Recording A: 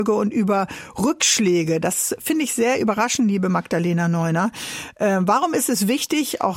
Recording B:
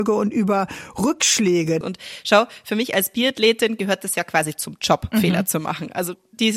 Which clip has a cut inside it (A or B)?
B